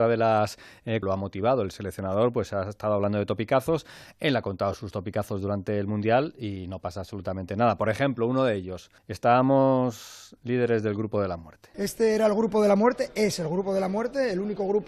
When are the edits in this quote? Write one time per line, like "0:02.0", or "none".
0:01.0
0:09.0